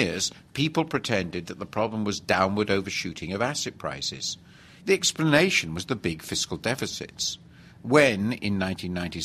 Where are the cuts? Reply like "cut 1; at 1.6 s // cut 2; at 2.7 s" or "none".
cut 1; at 4.8 s